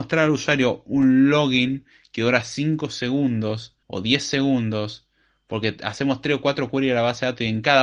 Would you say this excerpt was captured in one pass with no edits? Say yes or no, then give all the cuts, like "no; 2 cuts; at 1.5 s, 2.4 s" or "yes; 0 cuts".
no; 1 cut; at 3.8 s